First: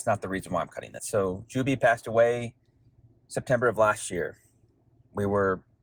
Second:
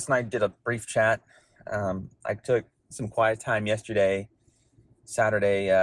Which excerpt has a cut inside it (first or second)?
first